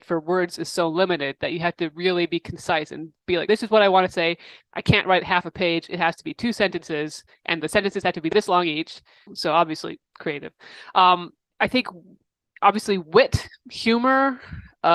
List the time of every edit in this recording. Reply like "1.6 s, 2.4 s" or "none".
3.5 s, 9.3 s